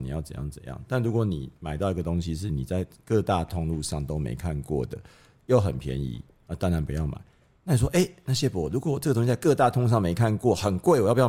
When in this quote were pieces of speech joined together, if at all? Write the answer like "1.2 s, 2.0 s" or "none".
none